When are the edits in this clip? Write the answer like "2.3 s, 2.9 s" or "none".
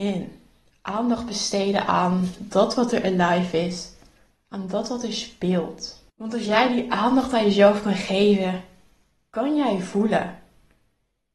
6.1 s